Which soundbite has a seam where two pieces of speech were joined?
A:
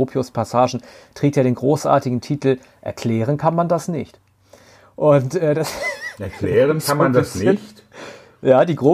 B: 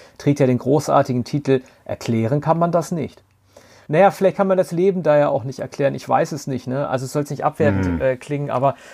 B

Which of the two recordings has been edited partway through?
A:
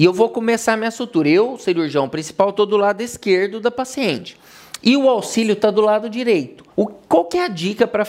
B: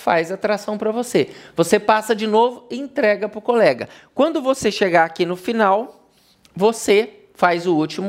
A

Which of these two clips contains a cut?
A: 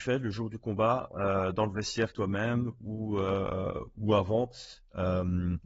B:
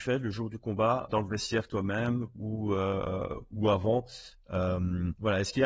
B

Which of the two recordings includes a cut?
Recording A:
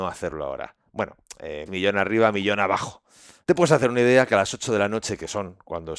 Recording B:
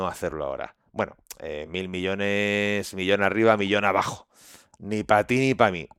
A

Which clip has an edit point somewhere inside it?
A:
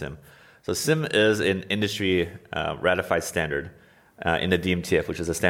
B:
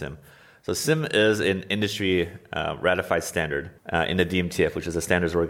B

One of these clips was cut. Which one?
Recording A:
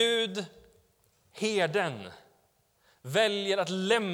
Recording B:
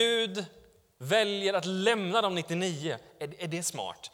B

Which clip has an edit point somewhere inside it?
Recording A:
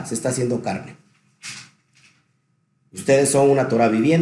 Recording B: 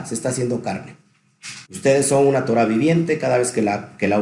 B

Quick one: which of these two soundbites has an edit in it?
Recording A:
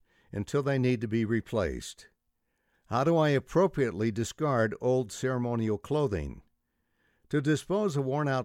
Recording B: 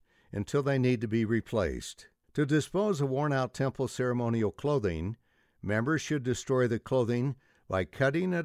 B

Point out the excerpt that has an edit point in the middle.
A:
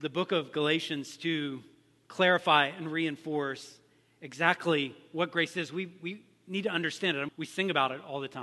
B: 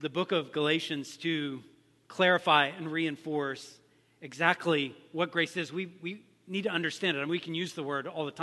A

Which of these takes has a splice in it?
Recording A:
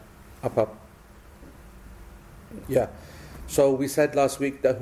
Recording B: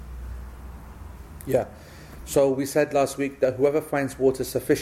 A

